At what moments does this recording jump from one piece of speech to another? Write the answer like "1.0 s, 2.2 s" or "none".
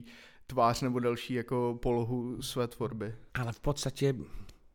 3.3 s